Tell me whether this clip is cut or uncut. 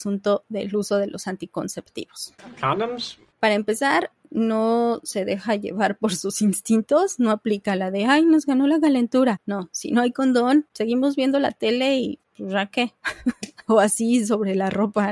cut